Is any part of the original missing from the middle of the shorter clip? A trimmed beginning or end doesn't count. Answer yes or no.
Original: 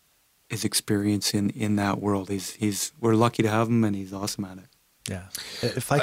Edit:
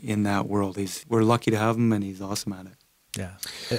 yes